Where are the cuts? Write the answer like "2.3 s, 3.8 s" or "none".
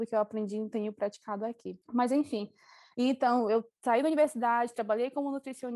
none